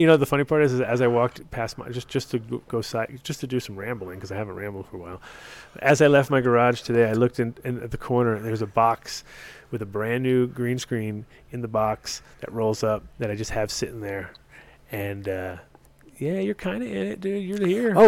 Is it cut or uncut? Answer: cut